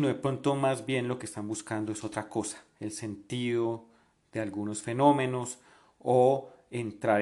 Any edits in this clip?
no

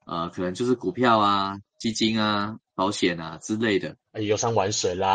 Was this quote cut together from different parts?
yes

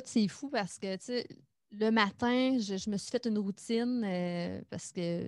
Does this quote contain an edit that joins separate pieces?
no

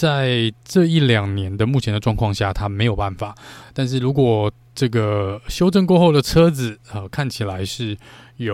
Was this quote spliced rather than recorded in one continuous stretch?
no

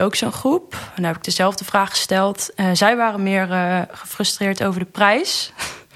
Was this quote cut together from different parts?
no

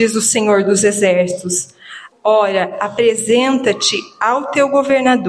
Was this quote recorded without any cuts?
no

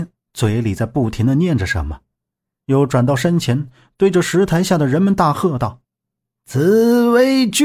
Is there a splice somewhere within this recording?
yes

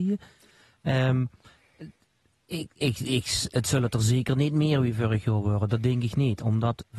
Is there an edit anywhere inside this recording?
no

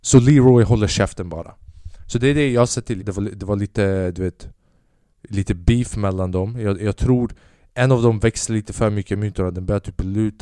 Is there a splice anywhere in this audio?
yes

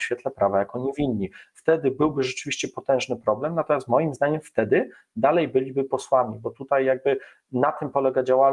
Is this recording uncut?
yes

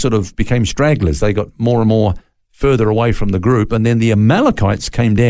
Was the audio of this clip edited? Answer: no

